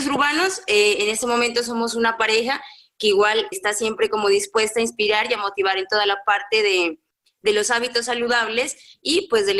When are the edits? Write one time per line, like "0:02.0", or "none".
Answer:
0:03.5